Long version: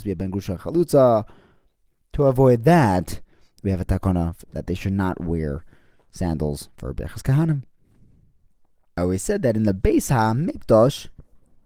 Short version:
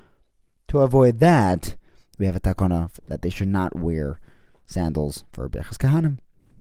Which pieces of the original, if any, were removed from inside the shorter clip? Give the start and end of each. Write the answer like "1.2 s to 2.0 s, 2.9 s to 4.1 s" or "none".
none